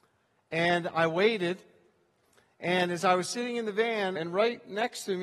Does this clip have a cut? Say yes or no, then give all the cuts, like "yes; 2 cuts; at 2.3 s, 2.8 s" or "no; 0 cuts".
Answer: yes; 1 cut; at 4.2 s